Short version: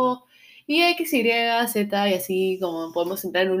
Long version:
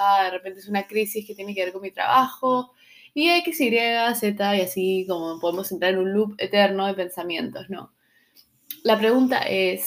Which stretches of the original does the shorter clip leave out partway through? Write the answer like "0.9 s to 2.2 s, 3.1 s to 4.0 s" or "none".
none